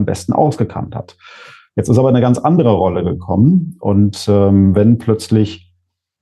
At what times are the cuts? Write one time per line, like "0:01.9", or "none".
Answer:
none